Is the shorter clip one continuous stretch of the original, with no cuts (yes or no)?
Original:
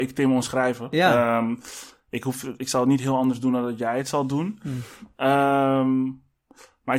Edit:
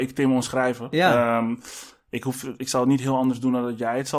yes